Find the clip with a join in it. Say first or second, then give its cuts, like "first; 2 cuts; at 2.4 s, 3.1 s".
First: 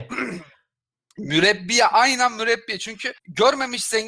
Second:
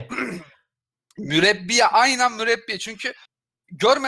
first; 1 cut; at 3.2 s